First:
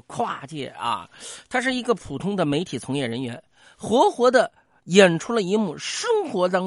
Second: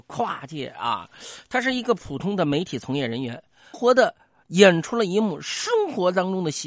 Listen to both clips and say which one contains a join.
second; 1 cut; at 3.7 s

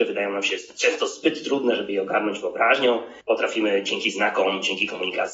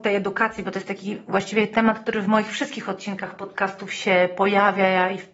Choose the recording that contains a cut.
first; 1 cut; at 3.2 s

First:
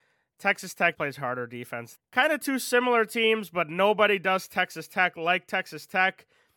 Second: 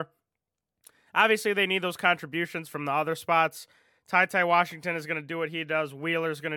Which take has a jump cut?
first; 2 cuts; at 0.9 s, 2.0 s

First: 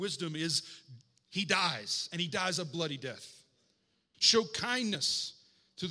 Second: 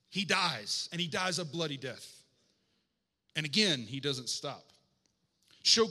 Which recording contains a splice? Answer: first; 1 cut; at 4.1 s

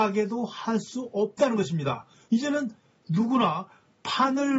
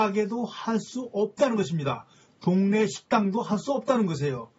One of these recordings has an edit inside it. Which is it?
first; 1 cut; at 2.3 s

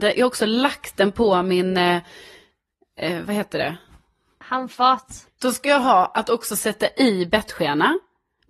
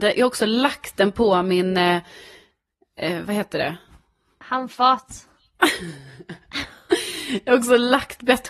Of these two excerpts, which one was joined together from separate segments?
first; 1 cut; at 5.3 s

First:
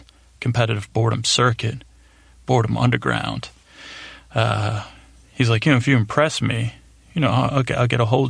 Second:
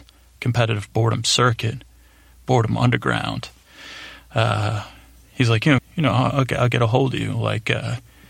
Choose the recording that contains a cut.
second; 1 cut; at 5.8 s

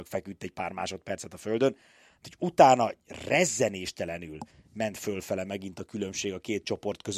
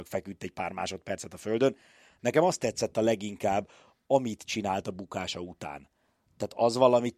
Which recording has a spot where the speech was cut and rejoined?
second; 1 cut; at 2.2 s

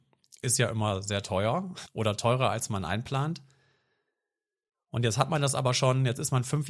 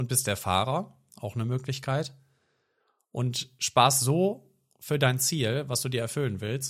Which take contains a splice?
first; 1 cut; at 1.9 s

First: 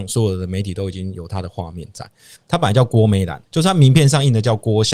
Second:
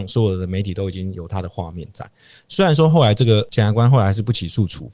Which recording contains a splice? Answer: first; 2 cuts; at 2.4 s, 3.4 s

